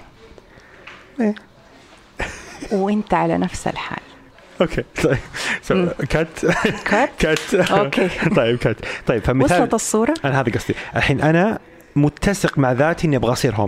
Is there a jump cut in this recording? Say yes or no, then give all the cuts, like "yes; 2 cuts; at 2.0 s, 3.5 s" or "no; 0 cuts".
no; 0 cuts